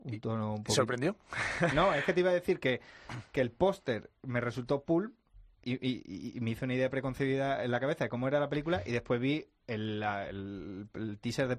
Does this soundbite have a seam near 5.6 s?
yes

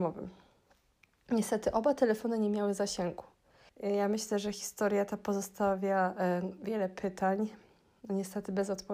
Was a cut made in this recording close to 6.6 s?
no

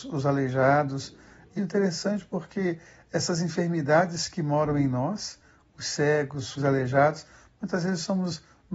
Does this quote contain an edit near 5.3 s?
no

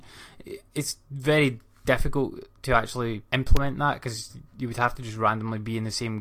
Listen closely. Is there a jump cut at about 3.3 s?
yes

